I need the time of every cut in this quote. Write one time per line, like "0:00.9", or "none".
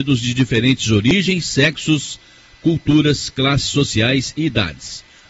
none